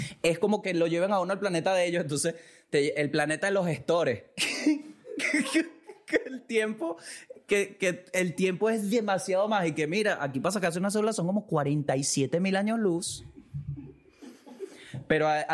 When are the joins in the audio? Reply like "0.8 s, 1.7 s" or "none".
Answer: none